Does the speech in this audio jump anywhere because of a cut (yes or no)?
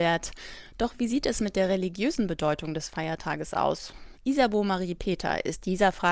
yes